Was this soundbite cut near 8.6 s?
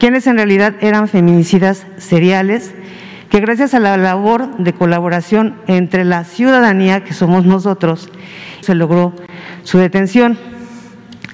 yes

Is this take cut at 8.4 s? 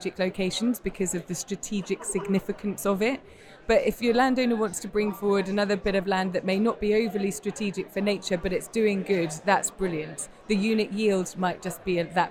no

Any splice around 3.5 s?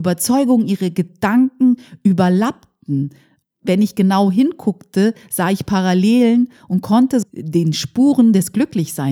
no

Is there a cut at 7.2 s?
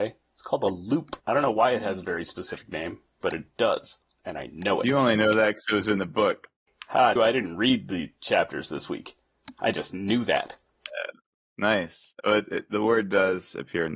yes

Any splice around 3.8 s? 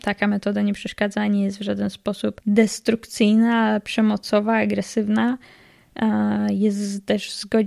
no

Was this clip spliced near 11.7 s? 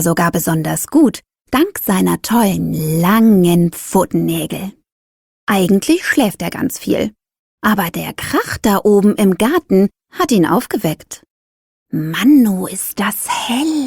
yes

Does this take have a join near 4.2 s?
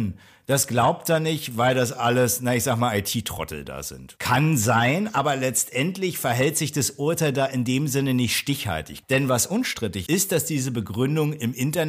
no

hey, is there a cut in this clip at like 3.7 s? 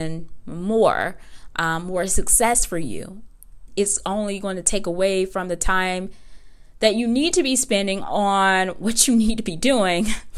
yes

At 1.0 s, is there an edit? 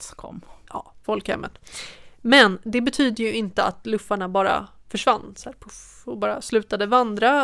yes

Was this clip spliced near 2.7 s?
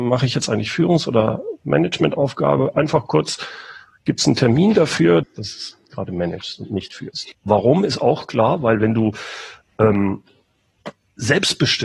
no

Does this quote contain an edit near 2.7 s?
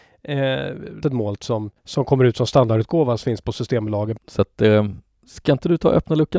no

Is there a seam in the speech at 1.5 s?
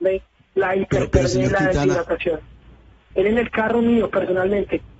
no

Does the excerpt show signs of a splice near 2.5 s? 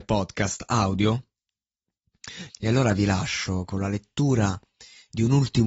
yes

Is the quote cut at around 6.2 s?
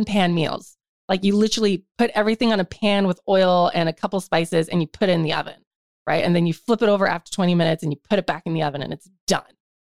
no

